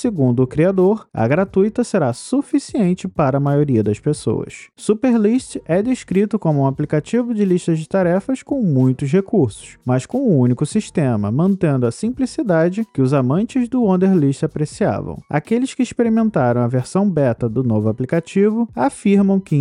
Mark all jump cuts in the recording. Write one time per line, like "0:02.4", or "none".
none